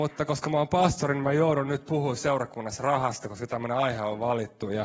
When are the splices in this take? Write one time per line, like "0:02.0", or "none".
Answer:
none